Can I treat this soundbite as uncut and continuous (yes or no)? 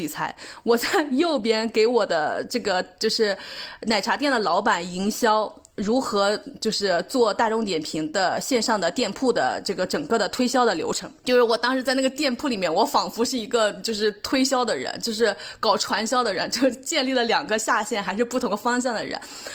yes